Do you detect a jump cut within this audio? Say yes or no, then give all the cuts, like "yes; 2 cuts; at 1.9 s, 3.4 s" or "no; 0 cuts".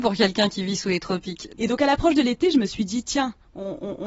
yes; 1 cut; at 1.6 s